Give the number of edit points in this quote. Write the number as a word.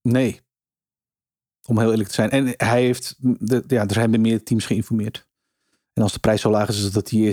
zero